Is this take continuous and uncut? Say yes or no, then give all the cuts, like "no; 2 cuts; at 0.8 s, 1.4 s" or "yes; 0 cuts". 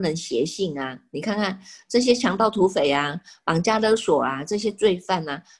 yes; 0 cuts